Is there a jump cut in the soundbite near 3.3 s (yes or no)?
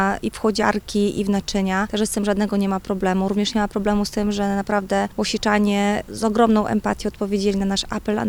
no